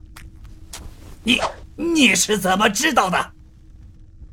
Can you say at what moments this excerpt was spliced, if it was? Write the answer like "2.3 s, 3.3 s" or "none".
none